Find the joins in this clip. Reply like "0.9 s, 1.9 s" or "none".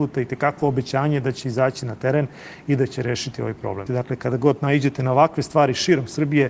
3.9 s